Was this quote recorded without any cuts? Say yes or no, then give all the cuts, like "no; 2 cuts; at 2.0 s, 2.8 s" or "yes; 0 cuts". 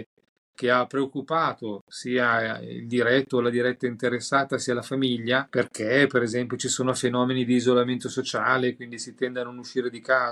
yes; 0 cuts